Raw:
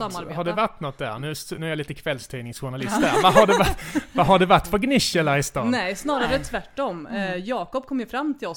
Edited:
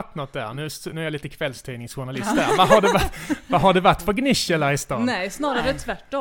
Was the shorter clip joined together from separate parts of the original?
no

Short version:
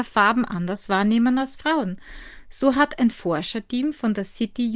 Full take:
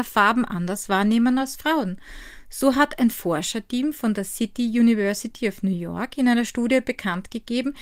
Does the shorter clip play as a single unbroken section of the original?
yes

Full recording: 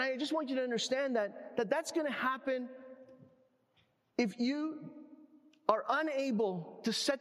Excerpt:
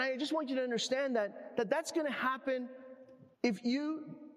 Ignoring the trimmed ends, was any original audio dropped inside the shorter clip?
yes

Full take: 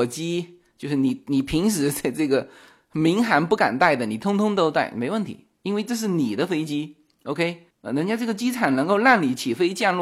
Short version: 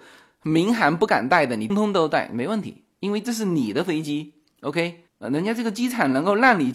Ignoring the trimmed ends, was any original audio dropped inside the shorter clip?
yes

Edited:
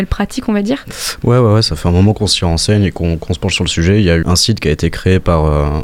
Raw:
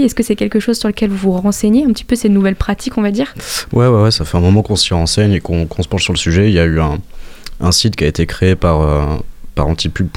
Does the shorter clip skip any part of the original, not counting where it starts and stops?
yes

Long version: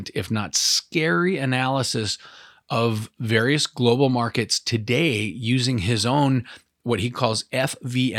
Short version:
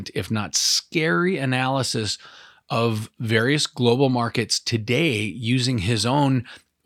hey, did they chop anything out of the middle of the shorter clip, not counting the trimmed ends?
no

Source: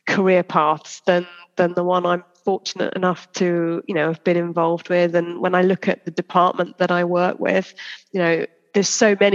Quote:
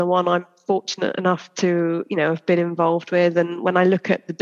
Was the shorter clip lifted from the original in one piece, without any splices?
yes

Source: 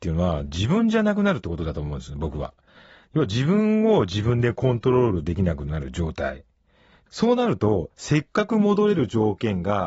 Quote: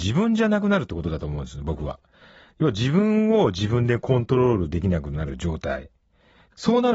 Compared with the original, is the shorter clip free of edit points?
yes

